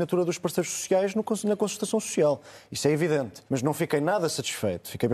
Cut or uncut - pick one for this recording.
cut